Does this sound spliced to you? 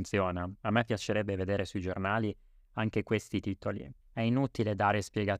yes; 1 cut; at 4.0 s

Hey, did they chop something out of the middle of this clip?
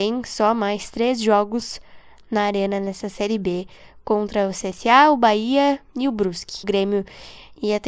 yes; 1 cut; at 6.6 s

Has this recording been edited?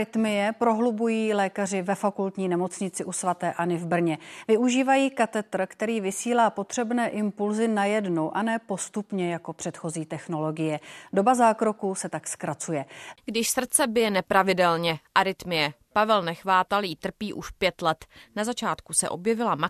yes; 1 cut; at 13.1 s

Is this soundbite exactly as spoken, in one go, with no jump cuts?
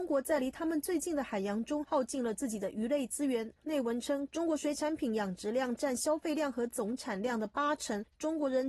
no; 1 cut; at 3.6 s

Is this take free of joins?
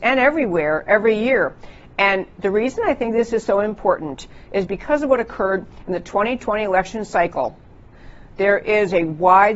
no; 1 cut; at 4.7 s

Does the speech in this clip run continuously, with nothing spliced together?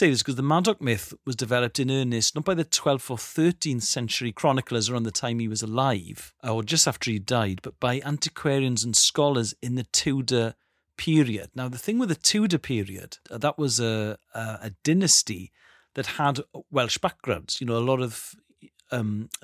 yes; 0 cuts

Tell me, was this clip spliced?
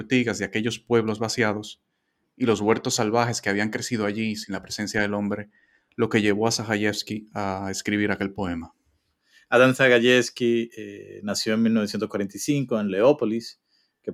no; 0 cuts

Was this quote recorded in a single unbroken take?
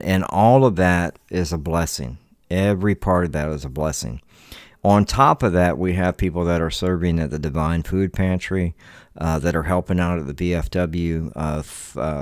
yes; 0 cuts

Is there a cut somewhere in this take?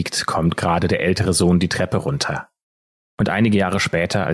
yes; 1 cut; at 3.1 s

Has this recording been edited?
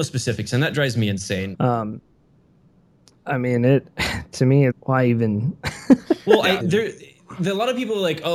yes; 3 cuts; at 1.5 s, 4.7 s, 6.6 s

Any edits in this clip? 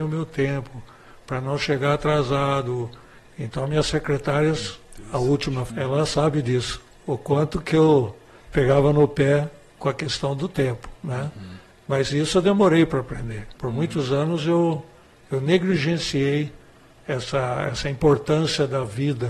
yes; 2 cuts; at 5.7 s, 13.5 s

